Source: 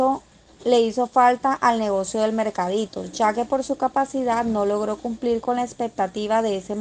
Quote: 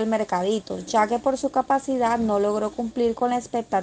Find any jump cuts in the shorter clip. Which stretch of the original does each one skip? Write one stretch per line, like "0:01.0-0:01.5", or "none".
none